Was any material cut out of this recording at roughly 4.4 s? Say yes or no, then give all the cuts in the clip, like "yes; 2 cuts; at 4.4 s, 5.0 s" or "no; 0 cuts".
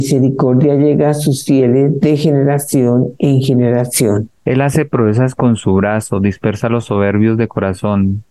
yes; 1 cut; at 4.4 s